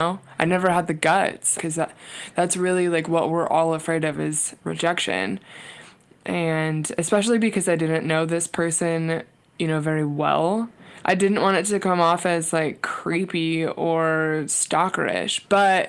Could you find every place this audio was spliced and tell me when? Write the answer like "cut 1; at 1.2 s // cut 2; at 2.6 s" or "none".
cut 1; at 1.6 s